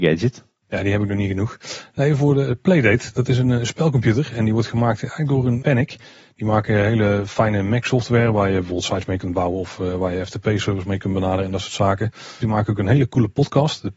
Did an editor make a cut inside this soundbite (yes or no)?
yes